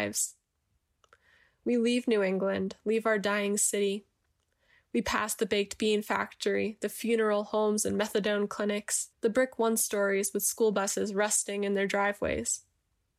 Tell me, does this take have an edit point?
yes; 1 cut; at 9.1 s

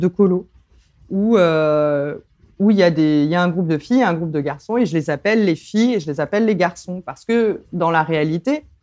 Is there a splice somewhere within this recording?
no; 0 cuts

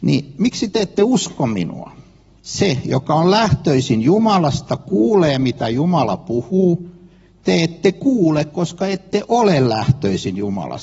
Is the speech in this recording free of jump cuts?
no; 1 cut; at 2.4 s

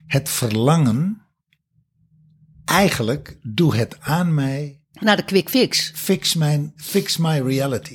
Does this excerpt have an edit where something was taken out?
no; 0 cuts

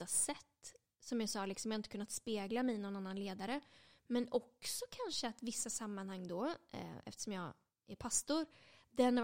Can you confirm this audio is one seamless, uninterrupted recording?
yes; 0 cuts

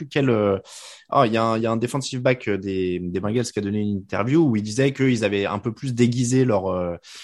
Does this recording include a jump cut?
no; 0 cuts

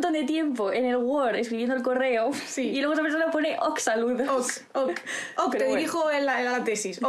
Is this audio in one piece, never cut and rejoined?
yes; 0 cuts

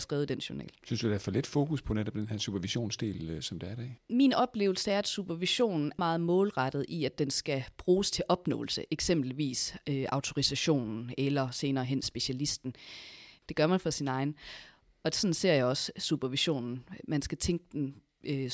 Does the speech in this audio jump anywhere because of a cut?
yes; 2 cuts; at 6.0 s, 13.4 s

